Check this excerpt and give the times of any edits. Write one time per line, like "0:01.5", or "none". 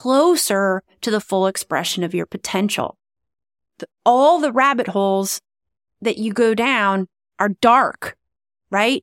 0:03.6